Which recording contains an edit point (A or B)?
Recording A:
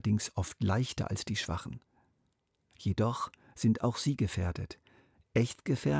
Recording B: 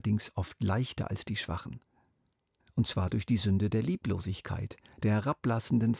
B